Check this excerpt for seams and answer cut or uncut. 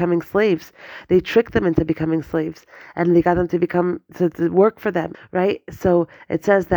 cut